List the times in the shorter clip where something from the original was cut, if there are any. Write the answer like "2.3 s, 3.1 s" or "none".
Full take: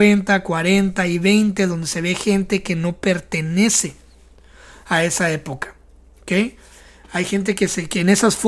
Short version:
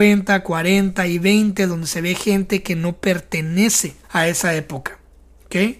4.0 s